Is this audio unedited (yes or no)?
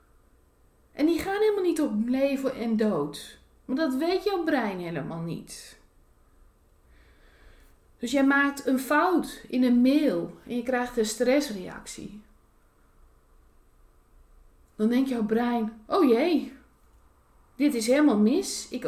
yes